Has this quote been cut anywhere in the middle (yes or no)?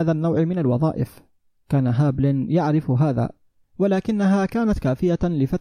no